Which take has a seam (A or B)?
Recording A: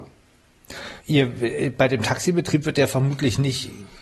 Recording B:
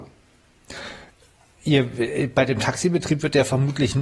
A